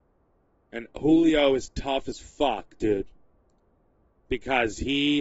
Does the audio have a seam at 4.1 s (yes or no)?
yes